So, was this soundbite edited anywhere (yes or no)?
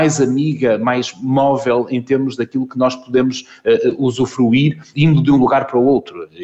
yes